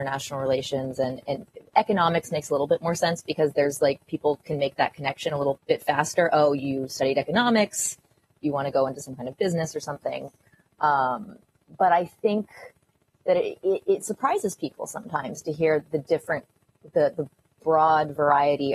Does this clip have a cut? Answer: no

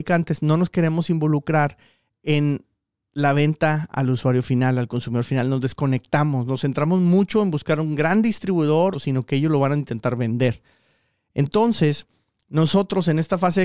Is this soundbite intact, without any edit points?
no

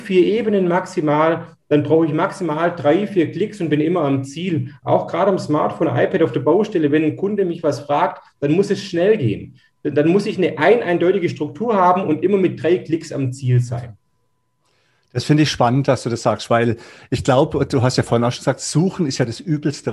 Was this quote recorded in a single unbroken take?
yes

